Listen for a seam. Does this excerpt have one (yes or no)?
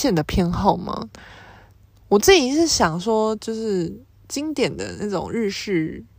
no